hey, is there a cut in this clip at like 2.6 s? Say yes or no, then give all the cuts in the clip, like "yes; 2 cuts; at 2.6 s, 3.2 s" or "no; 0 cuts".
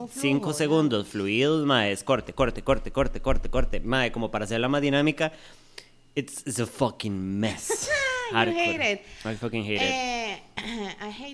no; 0 cuts